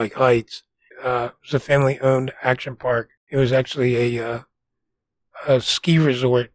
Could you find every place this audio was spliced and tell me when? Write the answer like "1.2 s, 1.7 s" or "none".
0.9 s, 3.2 s